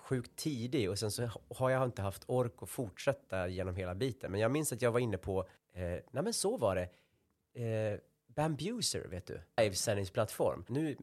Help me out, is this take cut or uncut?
cut